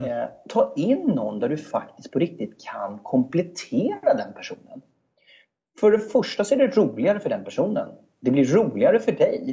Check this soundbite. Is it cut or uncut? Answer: uncut